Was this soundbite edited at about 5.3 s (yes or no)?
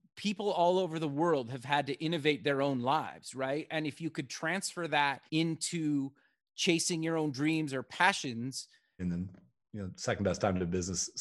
yes